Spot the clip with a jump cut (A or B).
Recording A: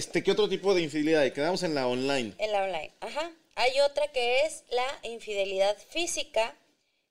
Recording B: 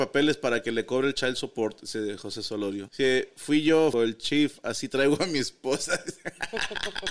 B